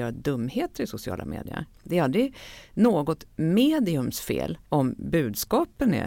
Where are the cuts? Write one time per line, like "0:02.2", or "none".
0:04.7